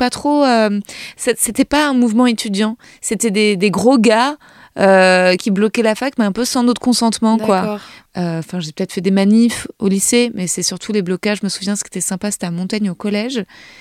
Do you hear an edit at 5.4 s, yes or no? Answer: yes